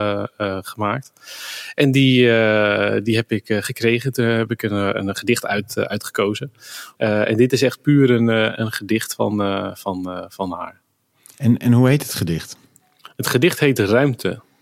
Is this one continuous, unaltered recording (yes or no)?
no